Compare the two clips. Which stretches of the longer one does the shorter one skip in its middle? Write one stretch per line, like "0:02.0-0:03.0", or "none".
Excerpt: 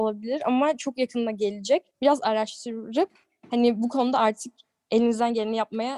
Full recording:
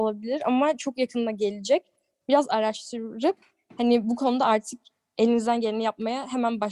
0:01.9-0:02.2